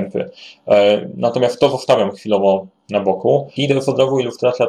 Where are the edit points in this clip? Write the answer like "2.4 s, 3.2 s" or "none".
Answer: 3.6 s

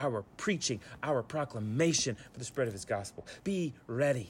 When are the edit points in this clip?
3.4 s

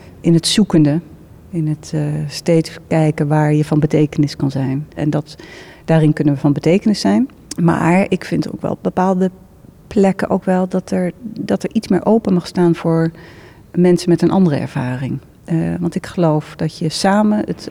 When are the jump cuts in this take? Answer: 5.0 s

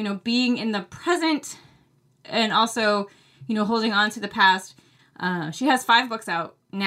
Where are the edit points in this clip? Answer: 5.0 s

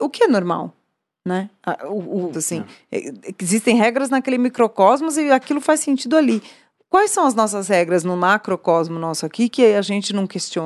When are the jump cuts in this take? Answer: 2.3 s

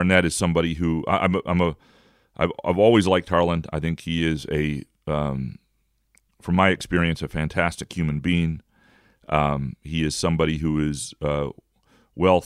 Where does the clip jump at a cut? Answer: none

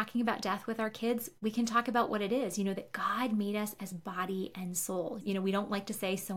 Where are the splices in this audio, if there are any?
5.2 s

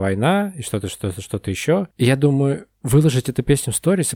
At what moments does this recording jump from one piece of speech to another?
1.9 s

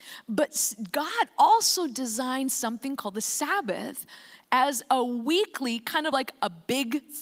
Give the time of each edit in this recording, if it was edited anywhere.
none

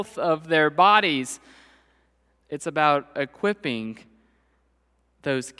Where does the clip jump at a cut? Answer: 2.4 s

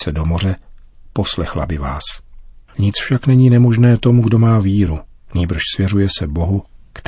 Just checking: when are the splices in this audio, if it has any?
2.7 s, 5.2 s

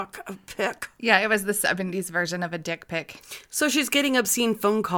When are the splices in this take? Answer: none

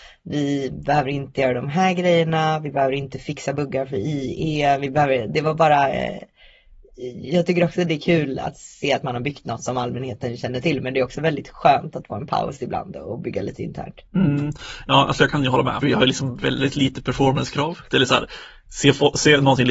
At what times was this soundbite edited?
14.1 s, 15.8 s, 17.9 s

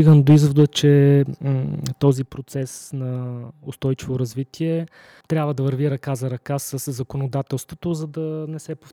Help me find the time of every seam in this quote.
5.2 s

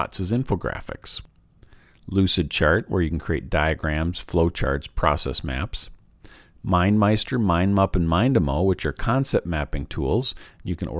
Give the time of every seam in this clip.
none

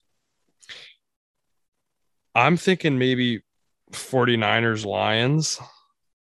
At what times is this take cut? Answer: none

